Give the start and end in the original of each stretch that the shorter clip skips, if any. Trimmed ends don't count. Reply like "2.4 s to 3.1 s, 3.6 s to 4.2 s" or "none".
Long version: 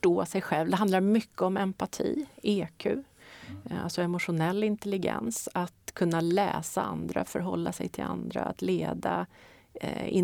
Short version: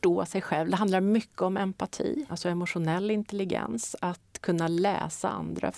2.3 s to 3.8 s